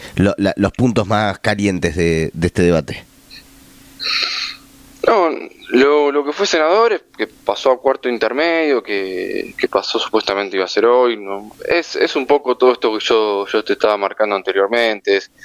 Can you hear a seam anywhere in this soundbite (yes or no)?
yes